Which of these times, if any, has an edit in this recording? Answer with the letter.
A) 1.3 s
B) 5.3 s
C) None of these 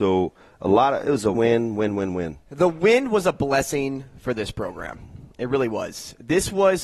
A